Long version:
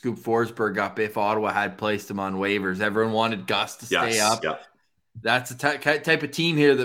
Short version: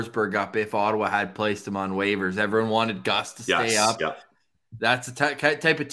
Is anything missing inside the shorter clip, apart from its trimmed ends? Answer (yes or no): no